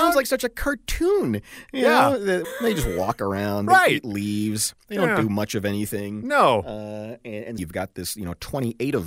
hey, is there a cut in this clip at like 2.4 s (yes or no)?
yes